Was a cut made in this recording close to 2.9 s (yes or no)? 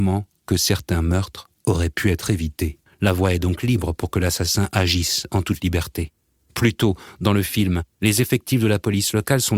yes